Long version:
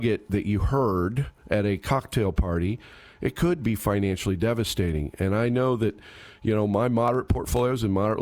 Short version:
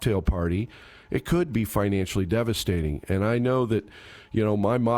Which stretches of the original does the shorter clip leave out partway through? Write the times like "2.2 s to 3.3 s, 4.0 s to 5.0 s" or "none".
none